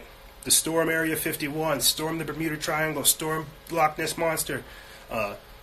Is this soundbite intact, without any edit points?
yes; 0 cuts

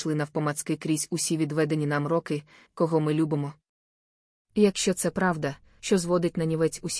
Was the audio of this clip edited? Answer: yes; 2 cuts; at 2.7 s, 5.8 s

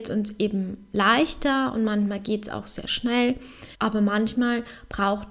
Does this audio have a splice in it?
yes; 1 cut; at 3.7 s

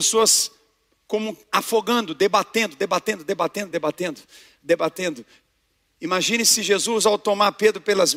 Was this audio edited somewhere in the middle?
yes; 1 cut; at 3.7 s

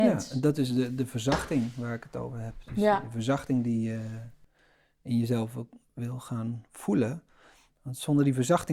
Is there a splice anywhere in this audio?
no; 0 cuts

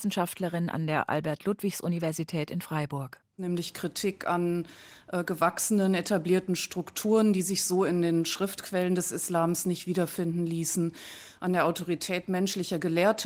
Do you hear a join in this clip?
no; 0 cuts

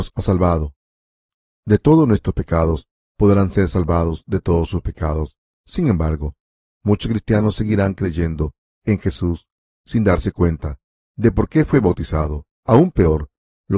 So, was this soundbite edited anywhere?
yes; 2 cuts; at 3.1 s, 12.5 s

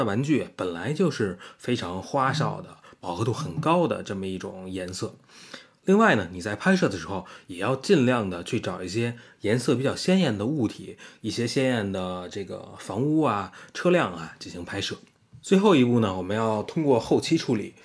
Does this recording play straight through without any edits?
yes; 0 cuts

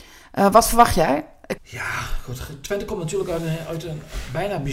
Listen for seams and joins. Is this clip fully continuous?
no; 1 cut; at 1.6 s

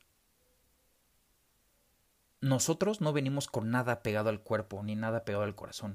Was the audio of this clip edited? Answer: no; 0 cuts

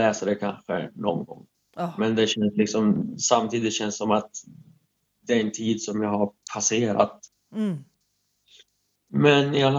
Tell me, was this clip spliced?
no; 0 cuts

